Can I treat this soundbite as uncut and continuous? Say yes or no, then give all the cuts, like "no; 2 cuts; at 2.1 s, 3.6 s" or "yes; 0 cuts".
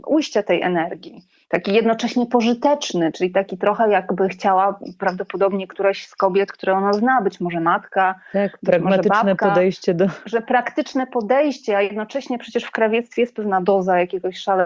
yes; 0 cuts